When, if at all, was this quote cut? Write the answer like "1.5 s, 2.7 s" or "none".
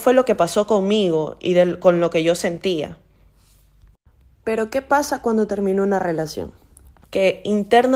7.0 s